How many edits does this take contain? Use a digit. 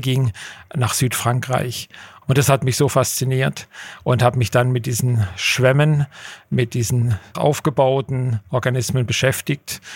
2